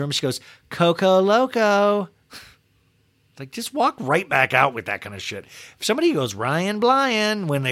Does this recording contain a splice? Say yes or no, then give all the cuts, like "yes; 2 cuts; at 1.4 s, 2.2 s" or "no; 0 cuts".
no; 0 cuts